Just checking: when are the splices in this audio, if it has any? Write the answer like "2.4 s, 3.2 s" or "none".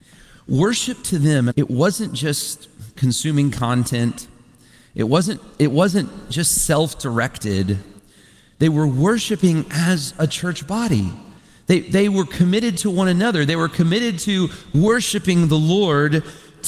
1.5 s